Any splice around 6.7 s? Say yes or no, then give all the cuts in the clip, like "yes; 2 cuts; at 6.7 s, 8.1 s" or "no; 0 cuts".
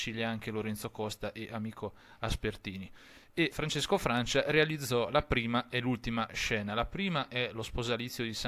no; 1 cut; at 3.5 s